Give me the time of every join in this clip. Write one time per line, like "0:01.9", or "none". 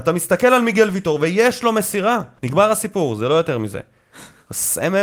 0:02.4